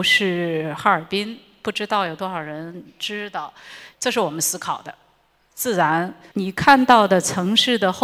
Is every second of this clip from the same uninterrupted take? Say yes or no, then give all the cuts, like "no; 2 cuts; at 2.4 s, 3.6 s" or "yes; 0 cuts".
no; 2 cuts; at 3.9 s, 6.3 s